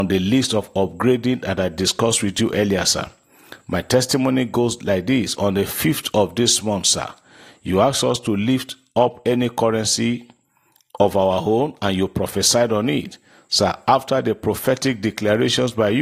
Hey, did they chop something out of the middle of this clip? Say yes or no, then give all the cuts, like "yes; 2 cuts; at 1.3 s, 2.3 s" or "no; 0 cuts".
no; 0 cuts